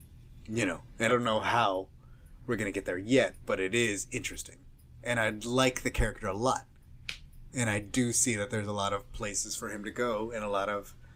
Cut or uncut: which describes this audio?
cut